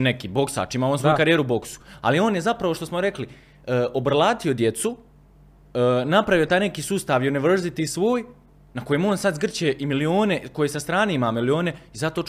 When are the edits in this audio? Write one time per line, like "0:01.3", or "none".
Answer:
none